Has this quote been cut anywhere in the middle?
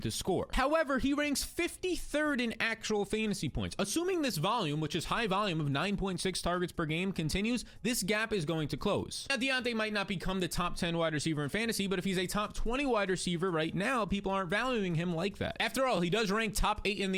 no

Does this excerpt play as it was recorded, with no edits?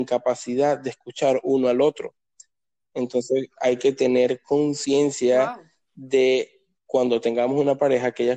yes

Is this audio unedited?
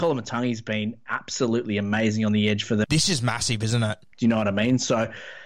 no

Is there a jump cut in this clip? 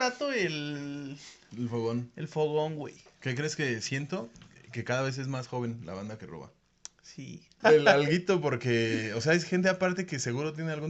yes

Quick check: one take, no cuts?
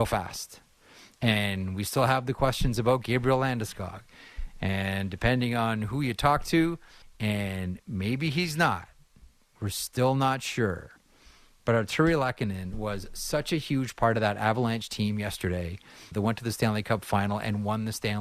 no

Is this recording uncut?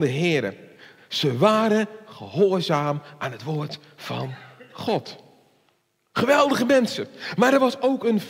yes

